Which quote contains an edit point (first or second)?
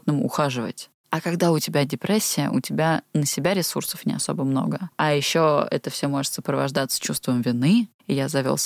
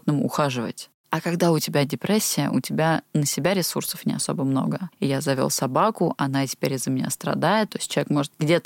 second